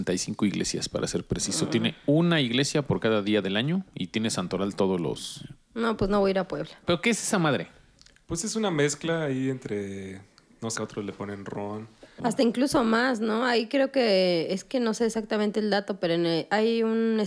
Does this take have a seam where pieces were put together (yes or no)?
yes